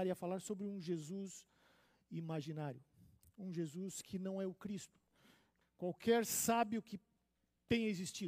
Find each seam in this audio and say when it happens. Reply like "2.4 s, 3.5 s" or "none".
3.2 s, 5.6 s